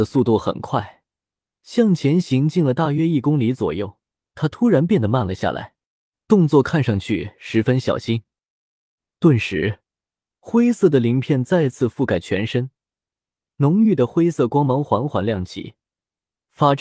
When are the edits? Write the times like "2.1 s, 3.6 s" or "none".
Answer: 9.1 s